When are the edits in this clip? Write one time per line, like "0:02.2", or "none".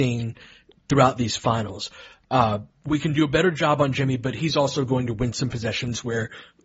none